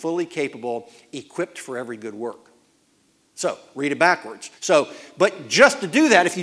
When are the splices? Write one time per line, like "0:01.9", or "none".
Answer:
0:04.6